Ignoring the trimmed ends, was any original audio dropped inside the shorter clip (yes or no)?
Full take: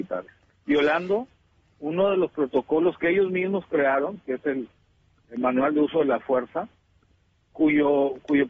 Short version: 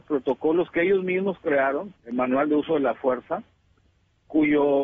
yes